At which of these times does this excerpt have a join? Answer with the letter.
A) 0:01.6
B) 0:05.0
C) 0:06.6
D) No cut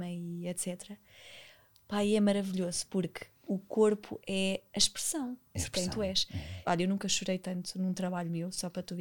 C